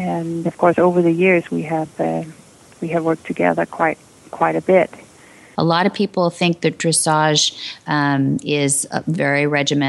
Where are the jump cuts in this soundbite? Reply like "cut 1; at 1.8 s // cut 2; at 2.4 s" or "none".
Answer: cut 1; at 5.5 s

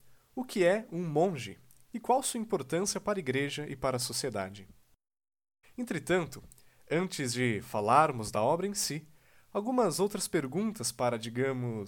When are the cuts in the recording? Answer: cut 1; at 5.6 s

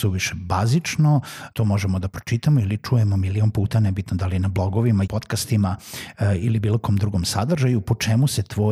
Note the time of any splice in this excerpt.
cut 1; at 1.5 s // cut 2; at 5.1 s

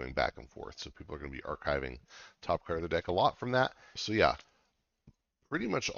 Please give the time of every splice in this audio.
cut 1; at 4.0 s

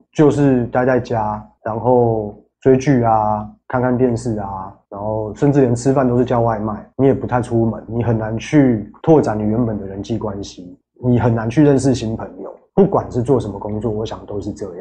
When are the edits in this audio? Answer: cut 1; at 7.9 s

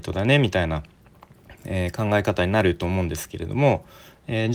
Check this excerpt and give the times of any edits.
none

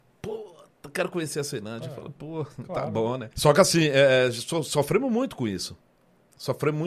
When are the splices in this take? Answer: cut 1; at 3.3 s

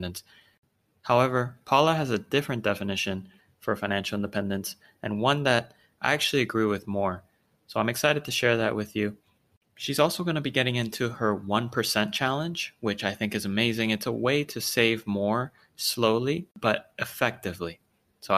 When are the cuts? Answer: none

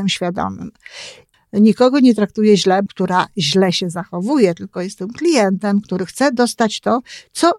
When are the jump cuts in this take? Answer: cut 1; at 1.3 s // cut 2; at 2.9 s

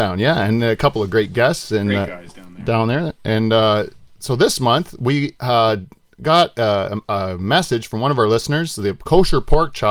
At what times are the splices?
none

